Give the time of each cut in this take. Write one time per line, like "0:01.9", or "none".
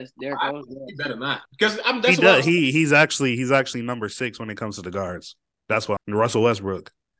0:06.0